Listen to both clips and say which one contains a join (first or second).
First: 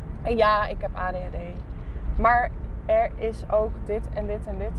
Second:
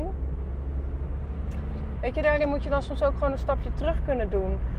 second